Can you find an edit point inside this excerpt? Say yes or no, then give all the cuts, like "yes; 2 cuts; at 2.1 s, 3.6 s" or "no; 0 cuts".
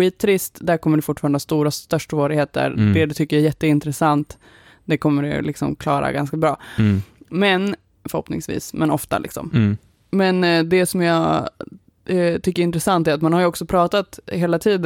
no; 0 cuts